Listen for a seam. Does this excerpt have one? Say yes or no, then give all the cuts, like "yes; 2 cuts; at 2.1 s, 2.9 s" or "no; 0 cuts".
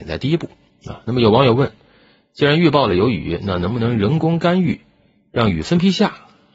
no; 0 cuts